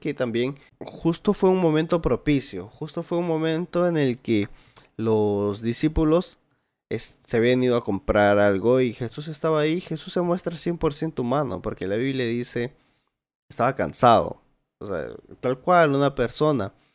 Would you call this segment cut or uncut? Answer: uncut